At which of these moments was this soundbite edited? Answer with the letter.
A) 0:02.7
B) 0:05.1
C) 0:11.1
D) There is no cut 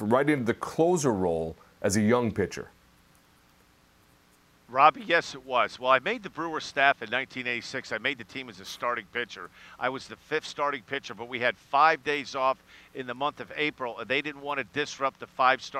D